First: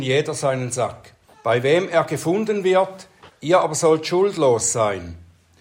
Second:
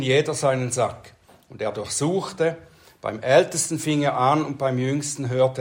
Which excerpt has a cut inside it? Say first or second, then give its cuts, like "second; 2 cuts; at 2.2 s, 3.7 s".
first; 2 cuts; at 1.3 s, 3.3 s